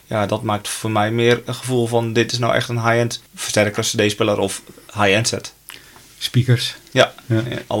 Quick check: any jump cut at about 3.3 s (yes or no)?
yes